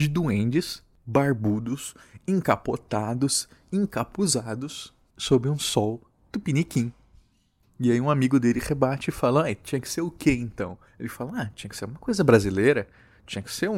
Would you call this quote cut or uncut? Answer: cut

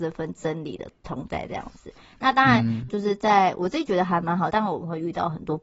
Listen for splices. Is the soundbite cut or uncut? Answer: cut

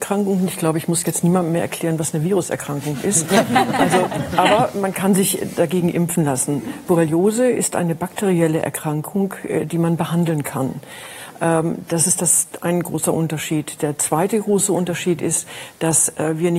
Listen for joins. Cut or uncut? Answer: uncut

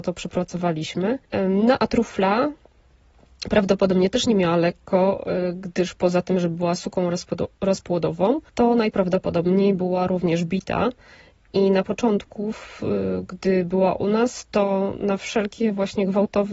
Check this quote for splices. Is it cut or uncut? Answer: cut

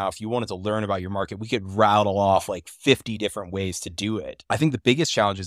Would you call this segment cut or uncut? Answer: uncut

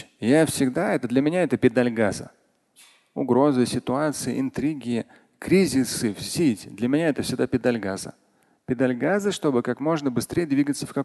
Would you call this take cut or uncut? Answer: uncut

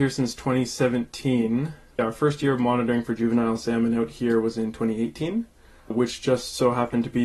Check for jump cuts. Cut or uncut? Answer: uncut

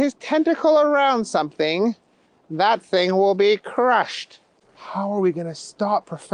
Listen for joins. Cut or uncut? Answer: cut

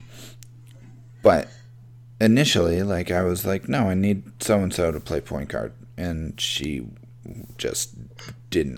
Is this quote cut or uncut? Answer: uncut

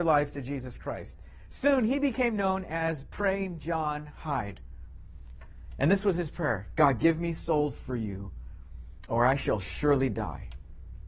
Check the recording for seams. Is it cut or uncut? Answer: uncut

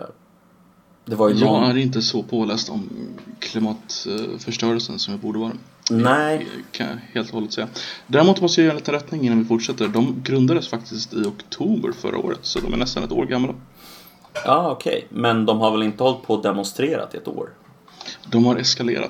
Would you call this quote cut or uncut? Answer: uncut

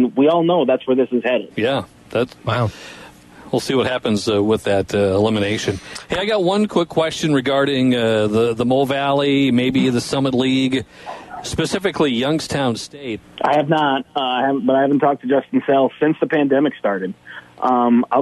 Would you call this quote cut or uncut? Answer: cut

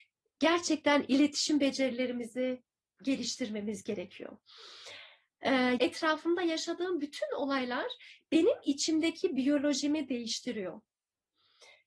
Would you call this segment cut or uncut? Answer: cut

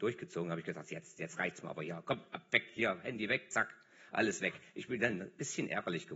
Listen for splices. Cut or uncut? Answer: uncut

